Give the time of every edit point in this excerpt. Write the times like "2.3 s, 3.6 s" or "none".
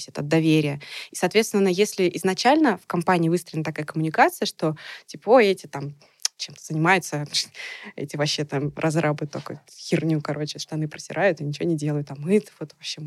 none